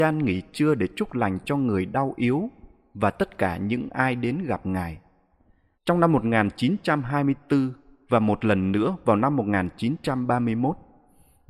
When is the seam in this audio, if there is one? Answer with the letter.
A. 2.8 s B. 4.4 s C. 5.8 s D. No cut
C